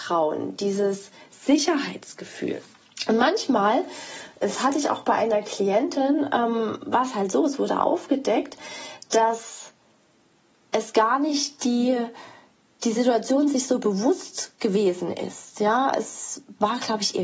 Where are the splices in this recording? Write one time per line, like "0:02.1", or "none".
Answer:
none